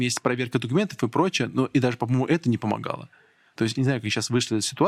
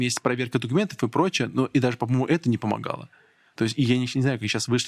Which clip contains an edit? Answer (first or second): first